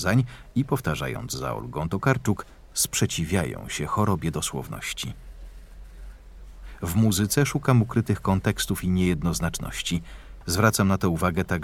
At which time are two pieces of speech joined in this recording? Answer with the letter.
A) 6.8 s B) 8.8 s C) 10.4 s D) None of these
C